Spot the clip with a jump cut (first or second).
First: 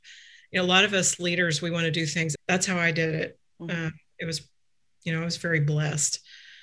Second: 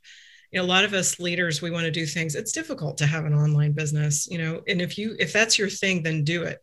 first